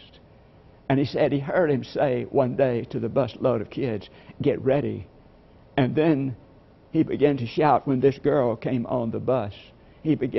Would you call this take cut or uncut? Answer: uncut